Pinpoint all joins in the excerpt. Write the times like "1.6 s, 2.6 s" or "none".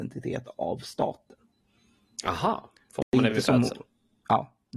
none